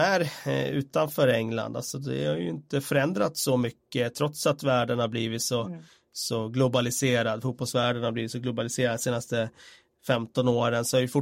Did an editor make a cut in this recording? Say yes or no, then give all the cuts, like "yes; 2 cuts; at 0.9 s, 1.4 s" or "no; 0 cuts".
no; 0 cuts